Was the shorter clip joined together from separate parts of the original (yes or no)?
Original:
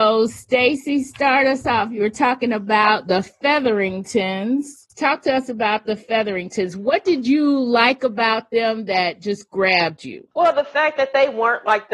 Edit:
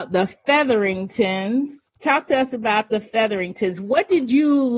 no